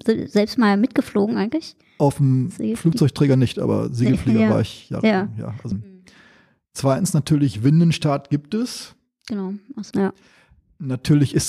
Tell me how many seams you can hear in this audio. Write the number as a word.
two